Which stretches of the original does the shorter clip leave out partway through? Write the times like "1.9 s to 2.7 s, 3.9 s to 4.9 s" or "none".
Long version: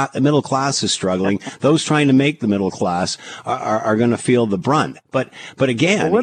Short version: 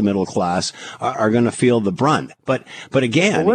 3.6 s to 3.8 s